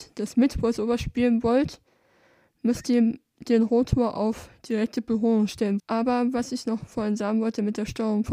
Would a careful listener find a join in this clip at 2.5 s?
no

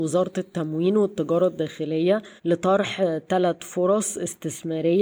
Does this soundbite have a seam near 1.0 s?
no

